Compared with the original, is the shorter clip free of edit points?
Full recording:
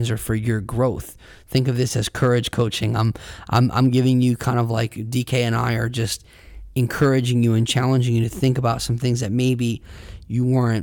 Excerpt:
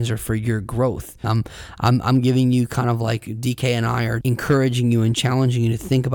no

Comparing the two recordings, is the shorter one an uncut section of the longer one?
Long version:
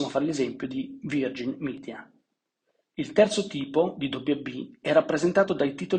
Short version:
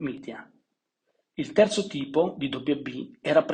yes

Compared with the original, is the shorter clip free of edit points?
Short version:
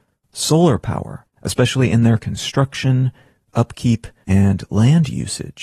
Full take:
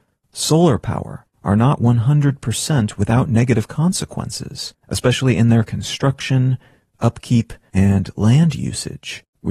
no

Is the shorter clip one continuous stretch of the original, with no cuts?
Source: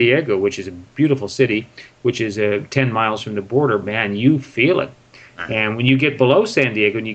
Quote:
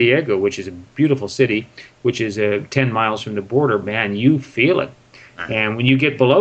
yes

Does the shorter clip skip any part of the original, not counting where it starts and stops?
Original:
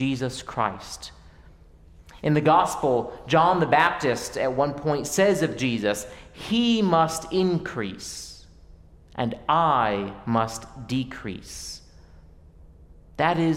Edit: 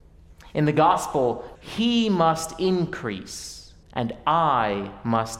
yes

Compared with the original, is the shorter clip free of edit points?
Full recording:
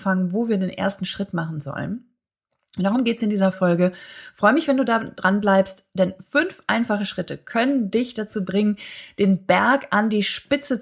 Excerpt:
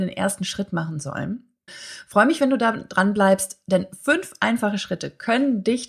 no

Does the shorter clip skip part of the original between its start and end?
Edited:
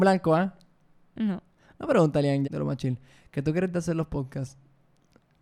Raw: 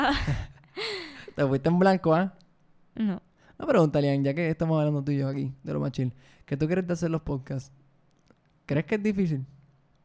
yes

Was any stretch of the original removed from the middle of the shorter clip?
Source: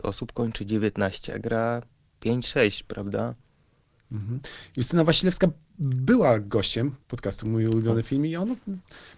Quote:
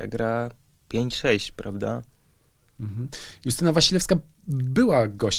no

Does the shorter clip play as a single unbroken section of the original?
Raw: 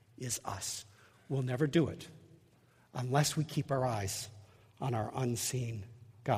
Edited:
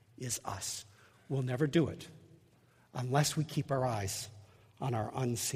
yes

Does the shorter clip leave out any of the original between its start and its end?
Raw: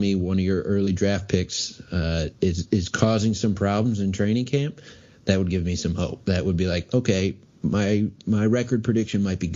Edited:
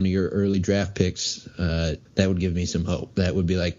yes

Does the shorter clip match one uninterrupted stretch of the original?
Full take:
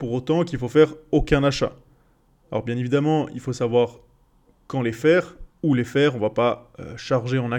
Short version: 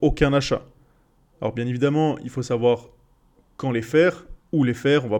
yes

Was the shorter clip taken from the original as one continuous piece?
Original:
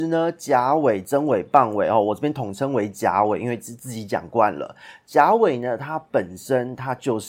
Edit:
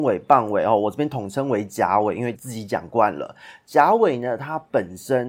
no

